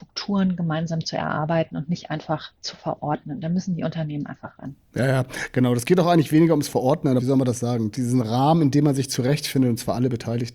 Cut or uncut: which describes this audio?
cut